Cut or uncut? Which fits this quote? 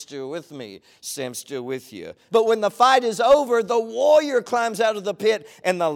cut